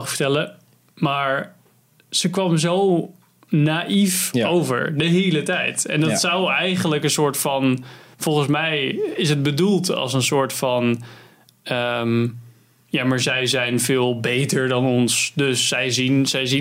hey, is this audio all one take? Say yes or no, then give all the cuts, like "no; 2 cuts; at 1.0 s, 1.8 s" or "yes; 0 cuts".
yes; 0 cuts